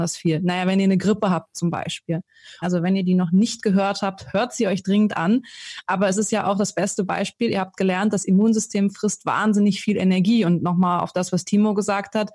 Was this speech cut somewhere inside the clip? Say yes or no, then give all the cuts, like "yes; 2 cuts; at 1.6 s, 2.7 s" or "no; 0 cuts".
yes; 1 cut; at 2.6 s